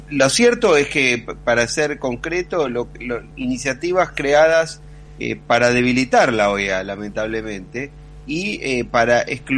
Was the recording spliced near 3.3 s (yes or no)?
yes